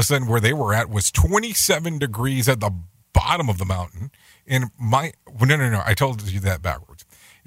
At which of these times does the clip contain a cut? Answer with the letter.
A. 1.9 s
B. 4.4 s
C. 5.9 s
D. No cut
D